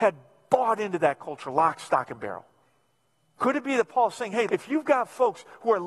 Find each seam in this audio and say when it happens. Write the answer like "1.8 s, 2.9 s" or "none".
3.4 s, 4.5 s